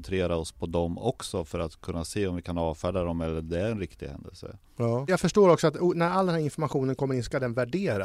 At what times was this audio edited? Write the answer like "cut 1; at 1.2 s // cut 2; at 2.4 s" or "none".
cut 1; at 5.1 s